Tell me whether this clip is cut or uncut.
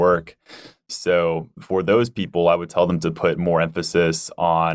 uncut